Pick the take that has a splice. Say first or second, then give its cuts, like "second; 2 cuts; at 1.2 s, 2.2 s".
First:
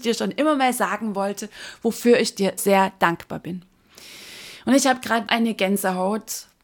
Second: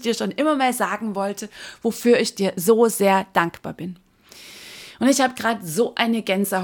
first; 2 cuts; at 2.6 s, 5.3 s